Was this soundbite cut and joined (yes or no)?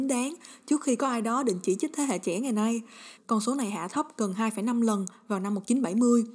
yes